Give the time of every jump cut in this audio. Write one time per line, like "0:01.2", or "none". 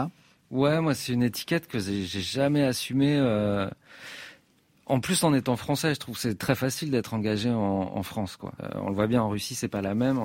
0:08.6

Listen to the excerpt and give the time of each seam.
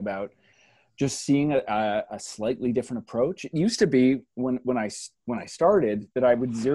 none

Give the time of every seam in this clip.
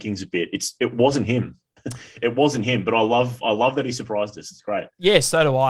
none

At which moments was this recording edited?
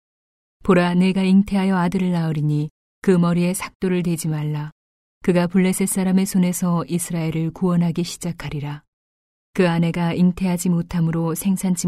0:05.0
0:09.4

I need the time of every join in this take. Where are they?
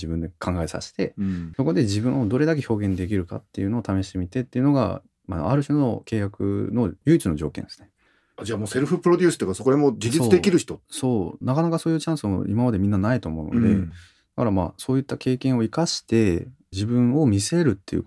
none

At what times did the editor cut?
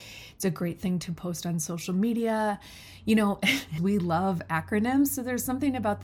0:03.8

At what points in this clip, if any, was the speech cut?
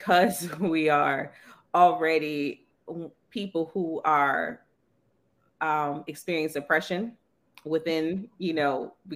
none

